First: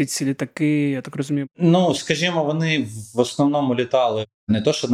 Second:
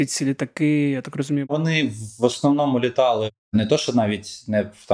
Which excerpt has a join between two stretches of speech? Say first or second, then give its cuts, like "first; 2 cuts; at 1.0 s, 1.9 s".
second; 1 cut; at 1.5 s